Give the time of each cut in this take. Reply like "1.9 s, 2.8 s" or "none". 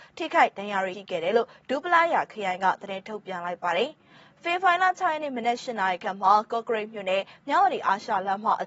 0.9 s